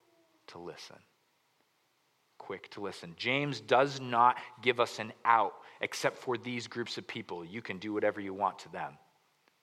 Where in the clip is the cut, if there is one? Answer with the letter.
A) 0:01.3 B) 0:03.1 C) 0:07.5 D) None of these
D